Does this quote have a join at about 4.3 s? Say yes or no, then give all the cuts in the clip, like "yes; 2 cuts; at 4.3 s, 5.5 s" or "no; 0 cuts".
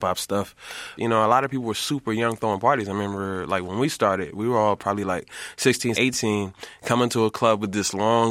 no; 2 cuts; at 1.0 s, 5.9 s